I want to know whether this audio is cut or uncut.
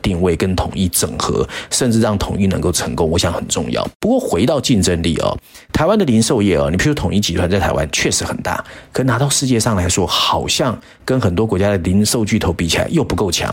uncut